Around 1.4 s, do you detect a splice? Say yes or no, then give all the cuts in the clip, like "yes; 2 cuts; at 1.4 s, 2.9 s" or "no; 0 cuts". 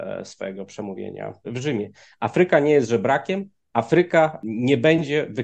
yes; 1 cut; at 1.4 s